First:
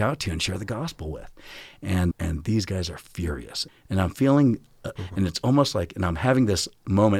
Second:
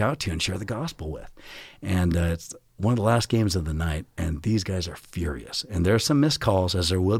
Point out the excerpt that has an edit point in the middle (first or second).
first